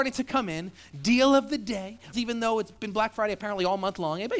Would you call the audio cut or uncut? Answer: cut